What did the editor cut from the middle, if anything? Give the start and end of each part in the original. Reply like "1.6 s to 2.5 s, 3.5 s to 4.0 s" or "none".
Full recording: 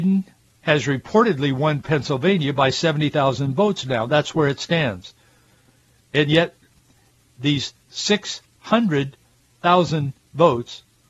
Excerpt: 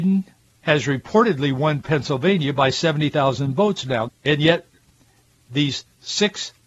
4.1 s to 6.0 s